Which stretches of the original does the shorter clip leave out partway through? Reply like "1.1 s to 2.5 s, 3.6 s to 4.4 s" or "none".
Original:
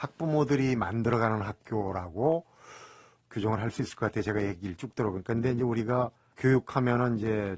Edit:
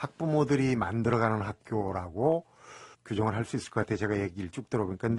2.9 s to 3.2 s